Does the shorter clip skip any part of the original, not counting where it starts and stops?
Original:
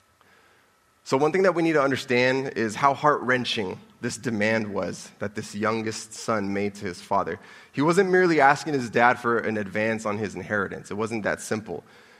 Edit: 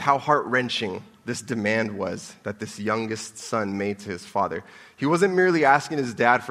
no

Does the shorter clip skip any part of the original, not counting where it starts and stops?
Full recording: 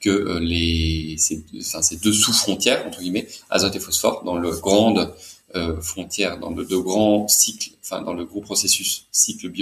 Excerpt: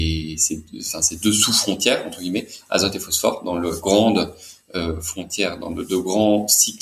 no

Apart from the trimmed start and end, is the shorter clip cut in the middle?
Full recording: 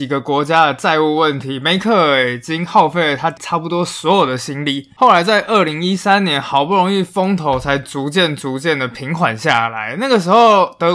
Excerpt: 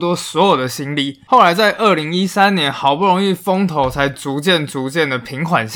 no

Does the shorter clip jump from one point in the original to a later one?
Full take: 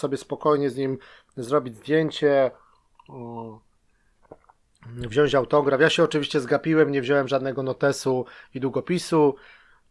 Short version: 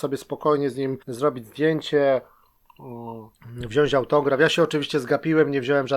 yes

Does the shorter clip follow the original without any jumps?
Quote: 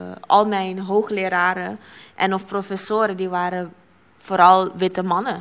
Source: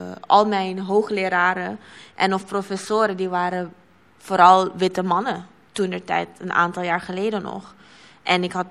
yes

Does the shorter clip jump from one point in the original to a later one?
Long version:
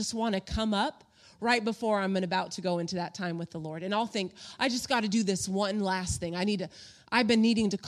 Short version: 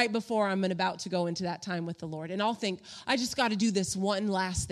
no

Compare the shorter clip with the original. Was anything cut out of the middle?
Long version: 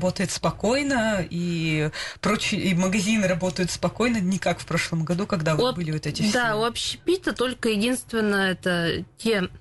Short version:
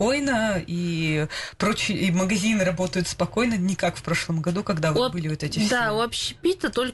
no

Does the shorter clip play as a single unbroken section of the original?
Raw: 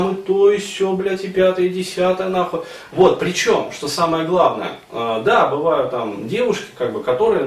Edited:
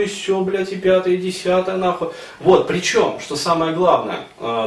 yes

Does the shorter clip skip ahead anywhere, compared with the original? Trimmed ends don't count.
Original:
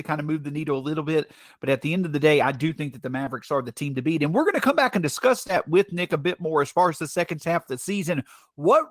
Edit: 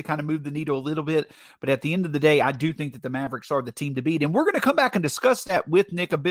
no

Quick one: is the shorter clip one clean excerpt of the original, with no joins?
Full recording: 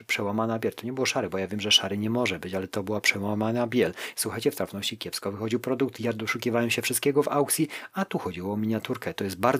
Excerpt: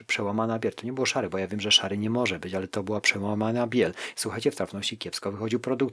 yes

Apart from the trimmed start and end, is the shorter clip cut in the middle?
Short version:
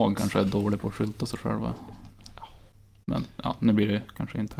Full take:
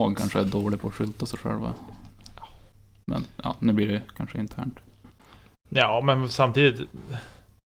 no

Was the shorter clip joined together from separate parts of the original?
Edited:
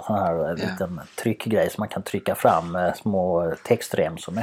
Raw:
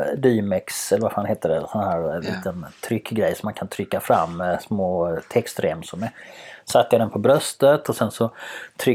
no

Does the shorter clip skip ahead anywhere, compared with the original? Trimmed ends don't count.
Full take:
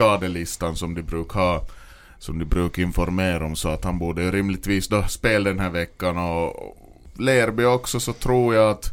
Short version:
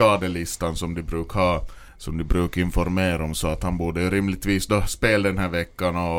yes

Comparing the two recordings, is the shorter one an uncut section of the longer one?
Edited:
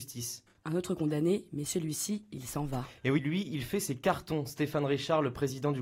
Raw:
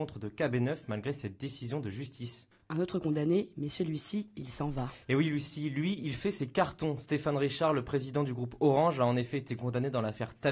no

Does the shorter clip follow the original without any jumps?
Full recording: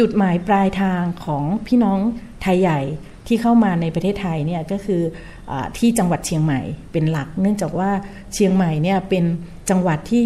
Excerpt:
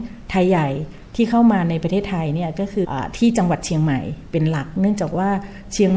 no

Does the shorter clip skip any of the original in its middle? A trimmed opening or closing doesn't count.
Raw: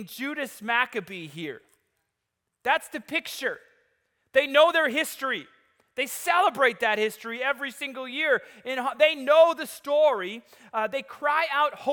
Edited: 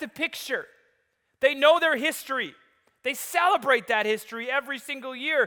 no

